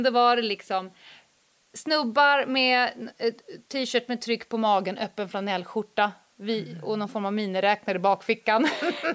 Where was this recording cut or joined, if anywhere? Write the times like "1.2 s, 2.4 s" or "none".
none